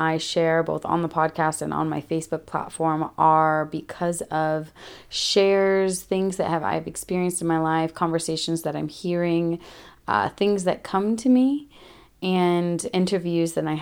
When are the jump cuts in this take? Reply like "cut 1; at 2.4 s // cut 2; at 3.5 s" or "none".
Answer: none